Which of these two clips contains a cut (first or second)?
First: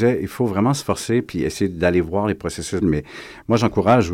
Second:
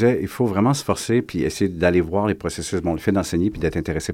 first